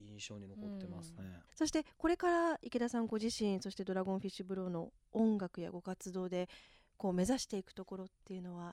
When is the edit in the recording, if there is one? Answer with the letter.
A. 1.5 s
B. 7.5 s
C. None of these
A